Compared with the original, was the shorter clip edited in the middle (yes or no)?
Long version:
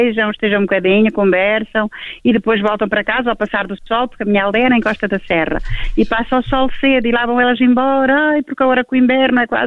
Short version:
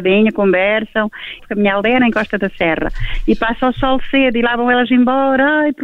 yes